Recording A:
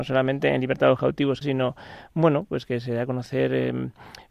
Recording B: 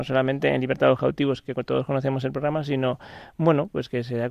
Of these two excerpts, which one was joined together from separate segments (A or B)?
A